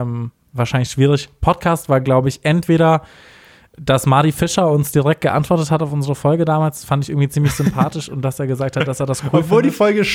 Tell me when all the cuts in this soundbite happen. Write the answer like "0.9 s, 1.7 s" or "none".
none

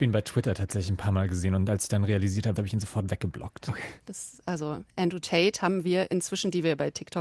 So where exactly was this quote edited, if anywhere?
2.6 s, 4.1 s

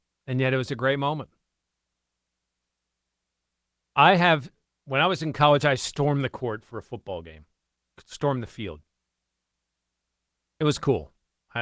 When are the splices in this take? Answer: none

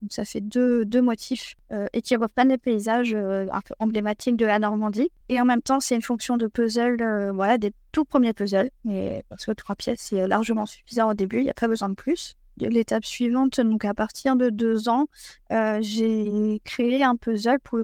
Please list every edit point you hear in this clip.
5.2 s

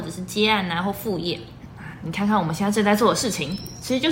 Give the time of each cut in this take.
1.7 s

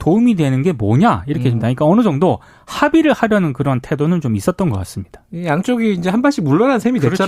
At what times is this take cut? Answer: 1.6 s

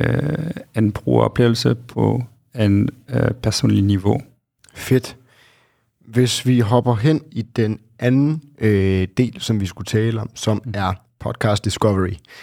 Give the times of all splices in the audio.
4.6 s

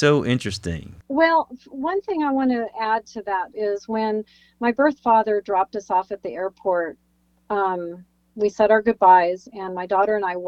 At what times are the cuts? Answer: 3.5 s

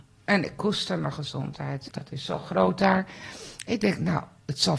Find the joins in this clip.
1.9 s

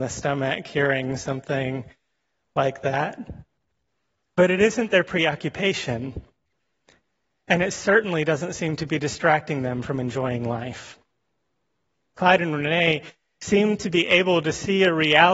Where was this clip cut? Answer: 12.2 s

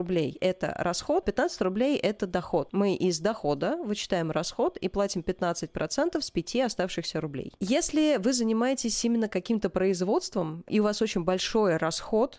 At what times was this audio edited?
none

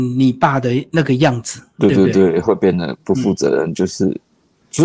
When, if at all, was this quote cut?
none

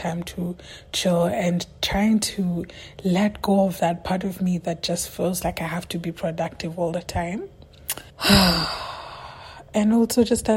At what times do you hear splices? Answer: 8.1 s

